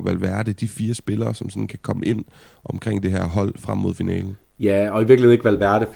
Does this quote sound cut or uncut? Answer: uncut